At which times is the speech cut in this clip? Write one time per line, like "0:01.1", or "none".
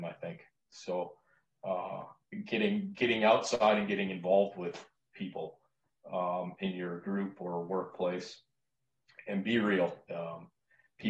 0:10.1